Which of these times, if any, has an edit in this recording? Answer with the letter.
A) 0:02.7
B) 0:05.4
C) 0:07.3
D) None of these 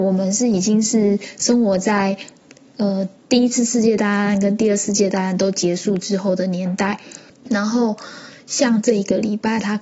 C